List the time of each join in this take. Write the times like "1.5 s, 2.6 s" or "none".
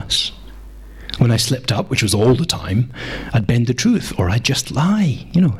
1.2 s